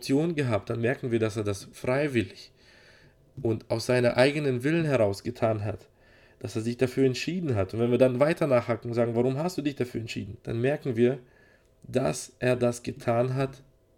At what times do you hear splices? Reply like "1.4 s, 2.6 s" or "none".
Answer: 10.4 s